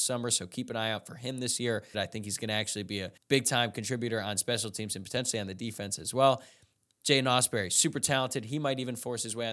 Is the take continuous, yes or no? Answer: no